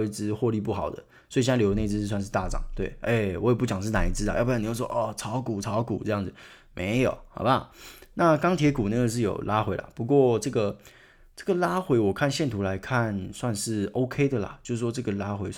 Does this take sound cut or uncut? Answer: uncut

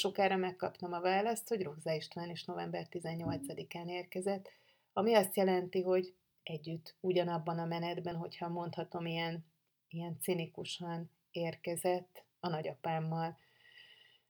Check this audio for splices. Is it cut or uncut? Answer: cut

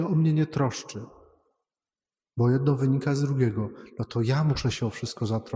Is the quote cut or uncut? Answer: uncut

